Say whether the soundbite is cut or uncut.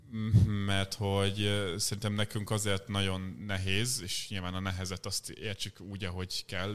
uncut